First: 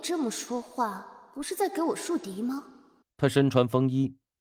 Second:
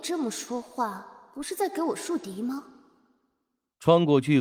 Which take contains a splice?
first; 1 cut; at 3.0 s

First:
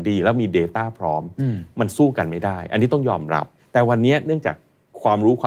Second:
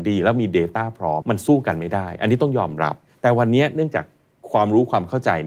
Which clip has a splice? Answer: second; 1 cut; at 1.2 s

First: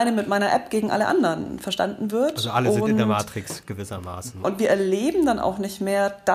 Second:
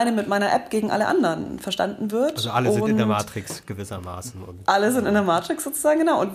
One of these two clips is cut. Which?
first; 1 cut; at 4.4 s

